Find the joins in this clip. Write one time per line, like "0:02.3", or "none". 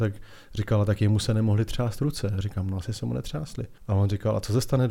0:03.8